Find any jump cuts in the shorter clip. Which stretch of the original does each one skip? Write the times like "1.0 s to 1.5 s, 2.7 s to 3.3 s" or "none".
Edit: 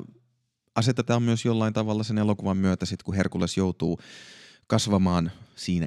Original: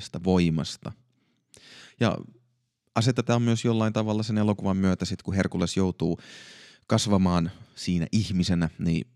none